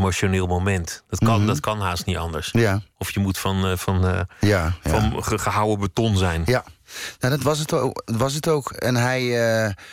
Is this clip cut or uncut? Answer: uncut